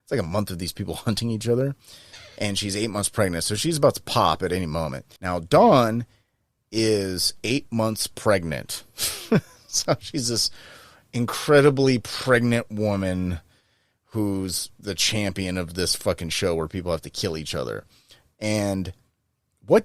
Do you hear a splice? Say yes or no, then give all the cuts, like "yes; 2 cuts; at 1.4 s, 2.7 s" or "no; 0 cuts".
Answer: yes; 1 cut; at 5.2 s